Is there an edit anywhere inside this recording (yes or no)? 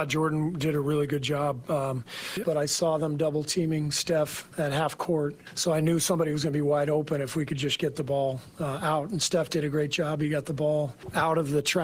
yes